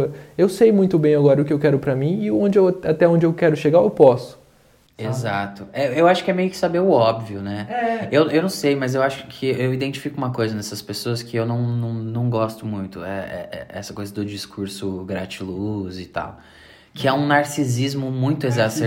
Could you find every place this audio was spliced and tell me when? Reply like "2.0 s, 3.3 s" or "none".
none

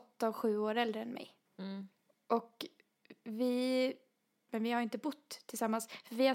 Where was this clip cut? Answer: 1.5 s, 4.5 s

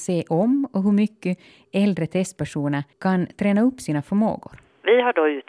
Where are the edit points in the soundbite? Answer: 2.9 s

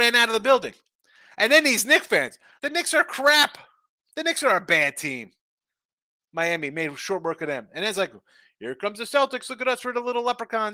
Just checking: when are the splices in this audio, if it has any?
2.6 s

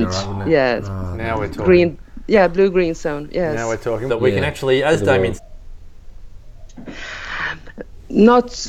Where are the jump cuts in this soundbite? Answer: 4.1 s, 5.4 s

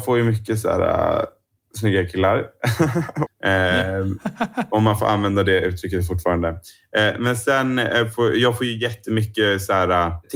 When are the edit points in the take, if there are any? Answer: 3.3 s

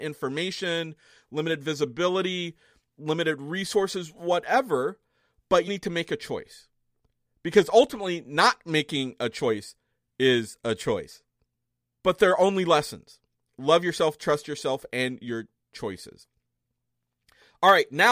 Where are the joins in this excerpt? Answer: 5.7 s

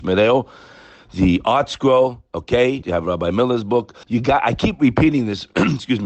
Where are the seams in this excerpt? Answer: 2.8 s, 4.0 s

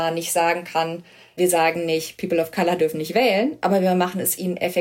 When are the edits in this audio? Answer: none

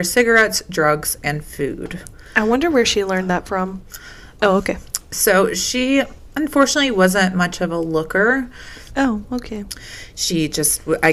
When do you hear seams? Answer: 4.4 s, 8.9 s

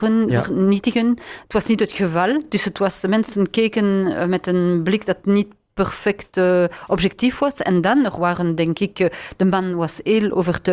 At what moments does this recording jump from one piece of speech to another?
none

